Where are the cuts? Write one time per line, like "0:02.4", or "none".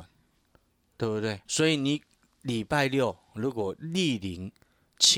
0:01.5